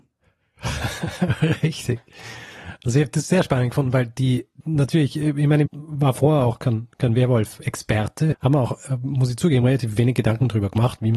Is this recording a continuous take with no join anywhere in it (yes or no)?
no